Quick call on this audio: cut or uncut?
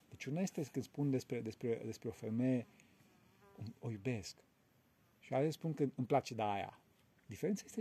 uncut